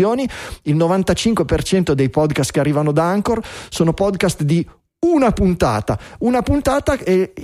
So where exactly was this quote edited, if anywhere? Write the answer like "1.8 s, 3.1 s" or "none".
none